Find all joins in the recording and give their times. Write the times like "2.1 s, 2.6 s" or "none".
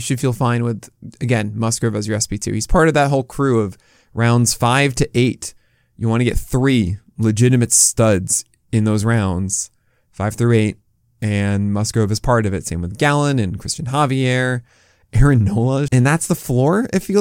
15.9 s